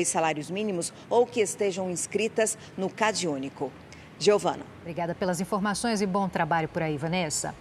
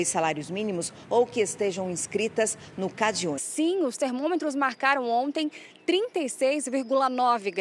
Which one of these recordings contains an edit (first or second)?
second